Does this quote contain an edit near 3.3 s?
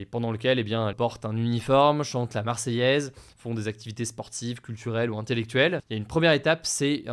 no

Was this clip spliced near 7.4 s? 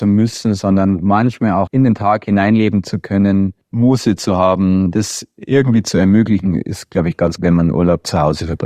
yes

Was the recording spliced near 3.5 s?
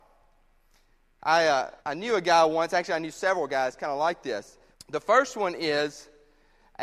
no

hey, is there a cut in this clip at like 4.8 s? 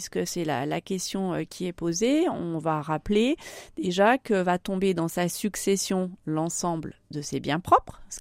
no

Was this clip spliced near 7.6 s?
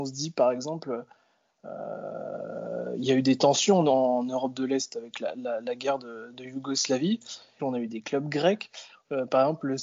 yes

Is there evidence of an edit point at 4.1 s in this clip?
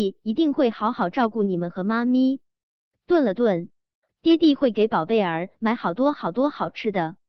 yes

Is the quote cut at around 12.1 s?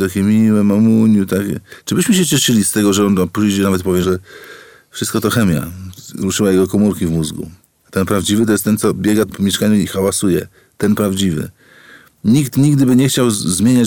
no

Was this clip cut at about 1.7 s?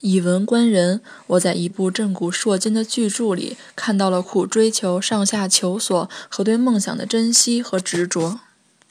yes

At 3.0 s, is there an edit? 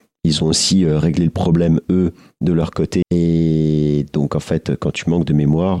yes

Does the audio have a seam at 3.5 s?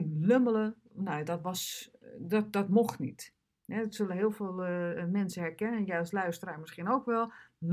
no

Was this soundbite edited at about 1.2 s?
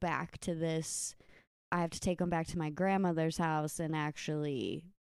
no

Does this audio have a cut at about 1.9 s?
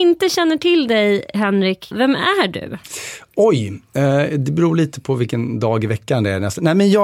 yes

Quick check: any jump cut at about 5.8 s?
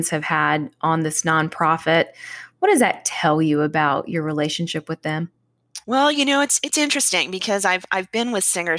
yes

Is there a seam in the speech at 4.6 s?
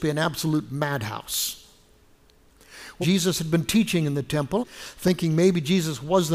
yes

